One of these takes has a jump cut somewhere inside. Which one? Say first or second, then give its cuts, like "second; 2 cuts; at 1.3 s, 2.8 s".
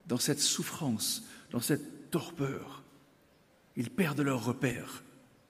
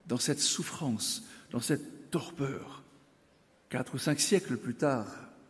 second; 1 cut; at 3.6 s